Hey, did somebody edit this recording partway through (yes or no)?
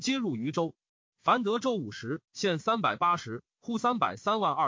yes